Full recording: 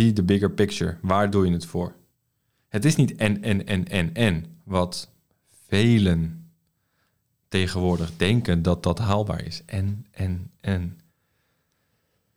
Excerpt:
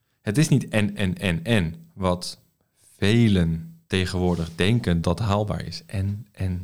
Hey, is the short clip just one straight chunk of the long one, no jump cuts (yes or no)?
no